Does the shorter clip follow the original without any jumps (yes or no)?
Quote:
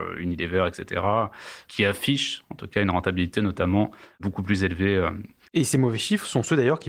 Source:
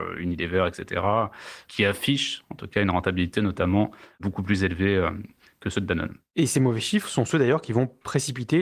no